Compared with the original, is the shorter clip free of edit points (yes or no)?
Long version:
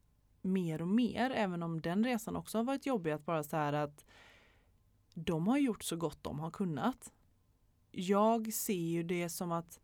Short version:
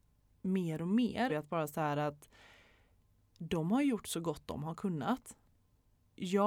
no